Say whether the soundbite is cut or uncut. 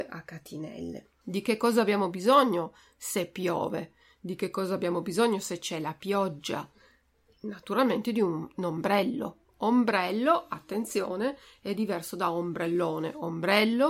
cut